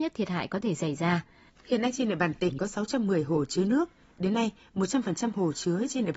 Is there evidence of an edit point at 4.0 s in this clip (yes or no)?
no